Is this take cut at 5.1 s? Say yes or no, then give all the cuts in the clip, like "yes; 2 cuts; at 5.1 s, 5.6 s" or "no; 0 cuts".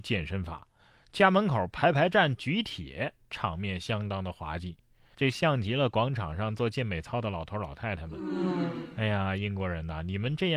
yes; 1 cut; at 5.1 s